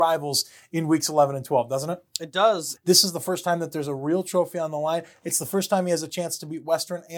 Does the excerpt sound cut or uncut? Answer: cut